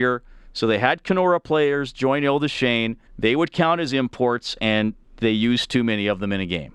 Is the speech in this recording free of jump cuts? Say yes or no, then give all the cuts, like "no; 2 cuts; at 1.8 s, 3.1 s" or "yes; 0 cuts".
no; 1 cut; at 3.1 s